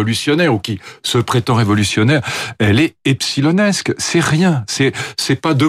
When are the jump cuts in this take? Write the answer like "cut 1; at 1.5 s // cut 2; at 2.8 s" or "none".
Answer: none